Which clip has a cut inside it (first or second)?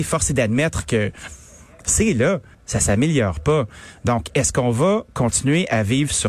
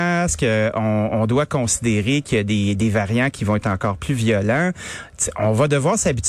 first